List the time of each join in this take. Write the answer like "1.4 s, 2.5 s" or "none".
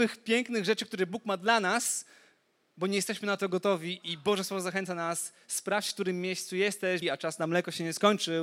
7.0 s